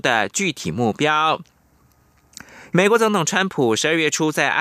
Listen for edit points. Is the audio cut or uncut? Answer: cut